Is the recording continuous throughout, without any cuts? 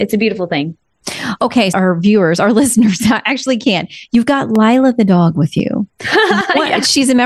no; 1 cut; at 1.7 s

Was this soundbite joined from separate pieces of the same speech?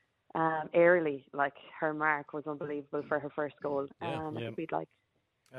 yes; 1 cut; at 3.9 s

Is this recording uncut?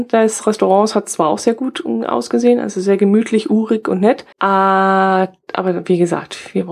no; 1 cut; at 4.3 s

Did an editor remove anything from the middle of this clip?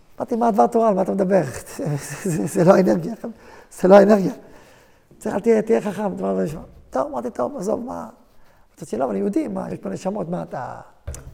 yes; 1 cut; at 9.7 s

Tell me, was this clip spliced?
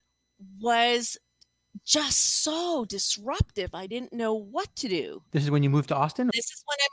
yes; 1 cut; at 5.3 s

